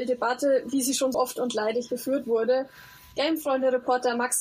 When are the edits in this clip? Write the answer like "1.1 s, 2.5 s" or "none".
1.1 s

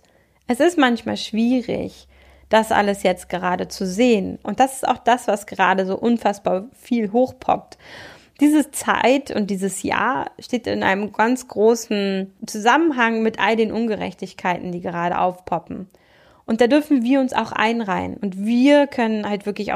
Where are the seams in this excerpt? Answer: 4.4 s, 12.4 s, 18.2 s

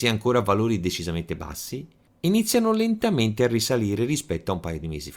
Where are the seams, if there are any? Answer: none

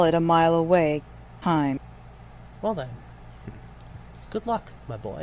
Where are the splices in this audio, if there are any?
2.5 s

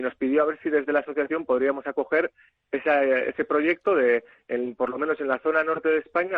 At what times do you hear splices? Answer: none

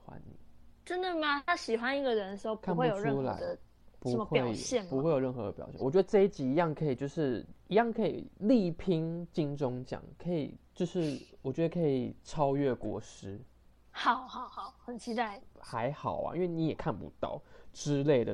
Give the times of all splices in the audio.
5.8 s, 15.4 s

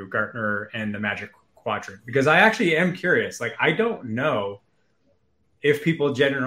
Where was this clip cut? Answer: none

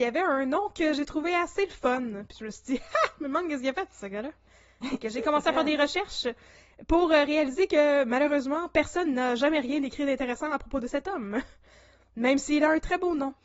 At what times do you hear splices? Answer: none

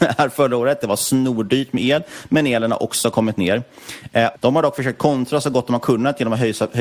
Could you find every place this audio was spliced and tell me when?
4.4 s

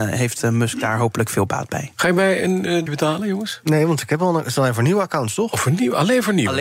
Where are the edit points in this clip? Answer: 2.9 s

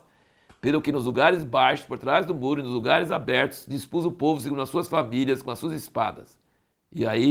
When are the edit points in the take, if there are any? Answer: none

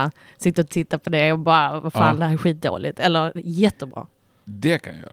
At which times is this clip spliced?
none

